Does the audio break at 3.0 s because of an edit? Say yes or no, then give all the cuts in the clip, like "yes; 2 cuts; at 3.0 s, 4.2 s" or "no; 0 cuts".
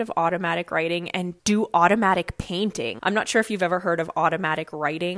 yes; 2 cuts; at 1.4 s, 3.0 s